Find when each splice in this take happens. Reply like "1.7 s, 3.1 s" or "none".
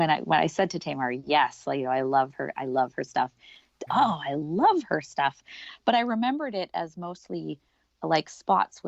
3.9 s